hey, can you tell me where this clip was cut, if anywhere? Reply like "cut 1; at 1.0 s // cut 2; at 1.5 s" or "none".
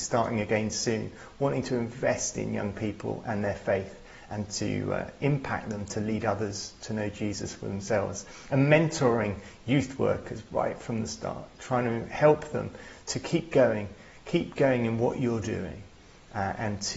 none